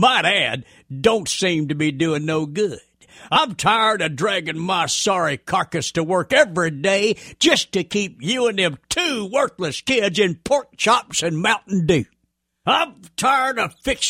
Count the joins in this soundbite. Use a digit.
0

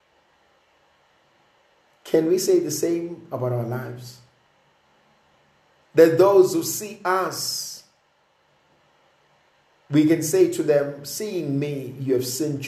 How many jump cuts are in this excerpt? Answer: 0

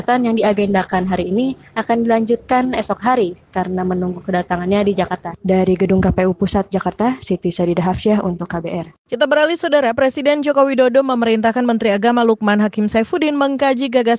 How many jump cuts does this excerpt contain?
1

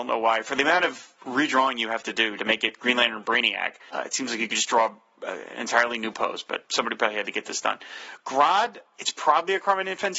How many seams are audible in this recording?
0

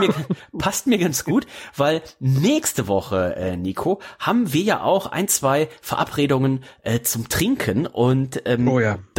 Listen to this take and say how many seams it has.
0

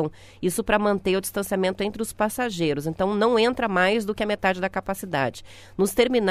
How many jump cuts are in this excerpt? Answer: 0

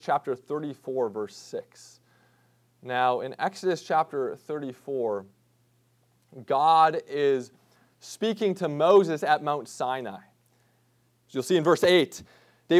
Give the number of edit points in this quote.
1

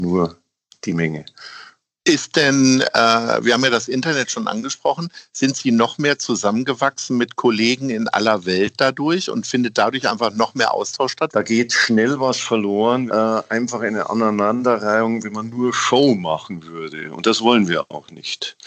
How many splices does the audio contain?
2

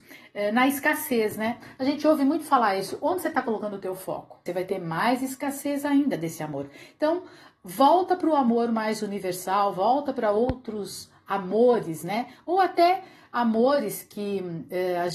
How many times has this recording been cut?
1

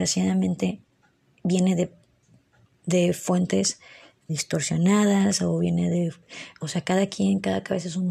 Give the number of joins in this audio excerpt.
1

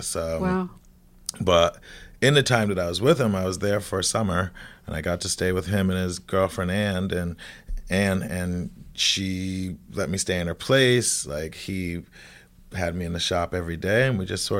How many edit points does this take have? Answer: 0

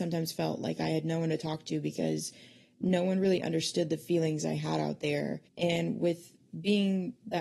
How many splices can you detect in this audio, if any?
1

